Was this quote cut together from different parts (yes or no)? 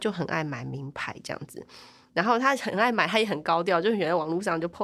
no